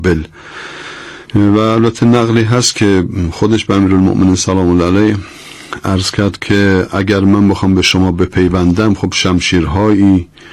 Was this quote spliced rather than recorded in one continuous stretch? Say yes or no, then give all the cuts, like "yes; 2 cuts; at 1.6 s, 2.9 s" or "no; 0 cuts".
yes; 1 cut; at 1.3 s